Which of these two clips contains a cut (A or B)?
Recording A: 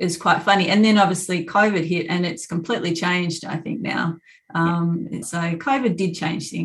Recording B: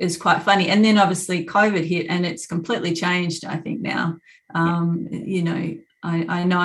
A